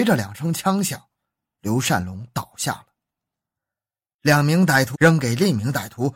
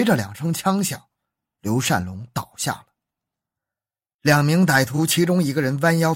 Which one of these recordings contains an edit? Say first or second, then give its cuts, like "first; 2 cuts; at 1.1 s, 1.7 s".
first; 1 cut; at 4.9 s